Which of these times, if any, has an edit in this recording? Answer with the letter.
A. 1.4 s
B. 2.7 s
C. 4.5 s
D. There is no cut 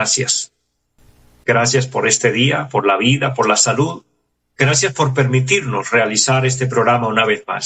A